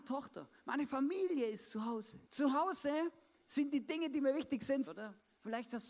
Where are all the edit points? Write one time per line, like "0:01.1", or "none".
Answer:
0:02.3
0:04.9